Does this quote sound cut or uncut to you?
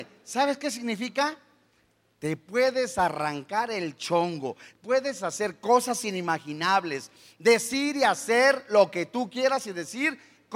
uncut